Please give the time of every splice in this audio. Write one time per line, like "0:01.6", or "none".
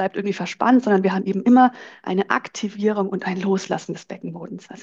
none

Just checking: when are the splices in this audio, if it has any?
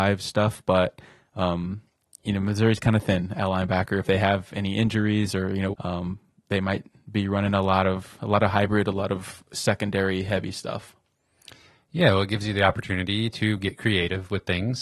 0:05.7

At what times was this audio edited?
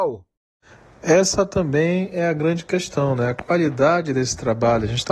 none

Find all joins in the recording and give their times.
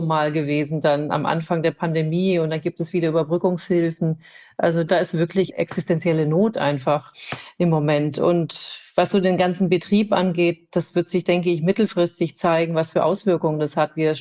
none

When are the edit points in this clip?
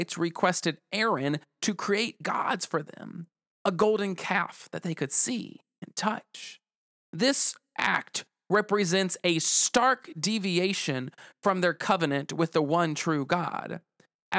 none

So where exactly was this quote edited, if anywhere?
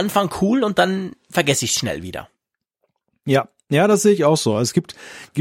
none

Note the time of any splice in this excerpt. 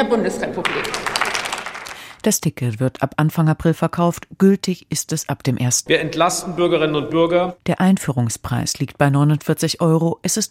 0:05.9
0:07.6

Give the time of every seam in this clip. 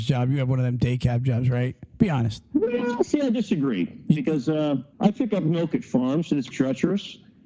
0:04.9
0:06.5

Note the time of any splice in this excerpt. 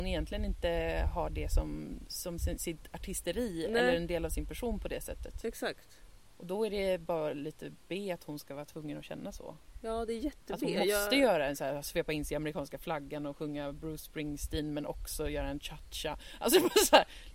0:02.4

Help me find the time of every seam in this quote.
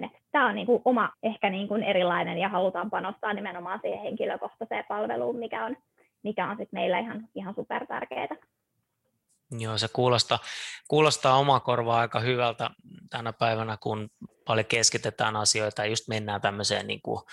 0:01.1
0:13.8

